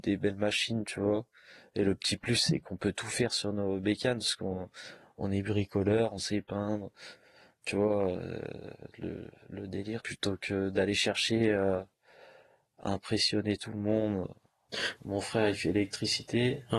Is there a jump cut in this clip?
yes; 2 cuts; at 10.0 s, 15.0 s

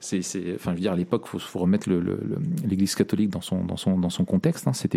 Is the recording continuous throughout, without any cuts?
yes; 0 cuts

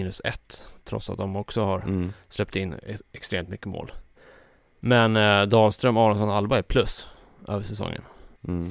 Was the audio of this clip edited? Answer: no; 0 cuts

